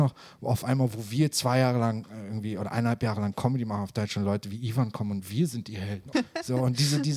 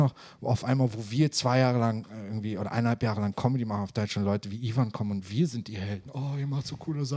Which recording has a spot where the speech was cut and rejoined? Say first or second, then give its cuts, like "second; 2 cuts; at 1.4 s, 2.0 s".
first; 1 cut; at 6.1 s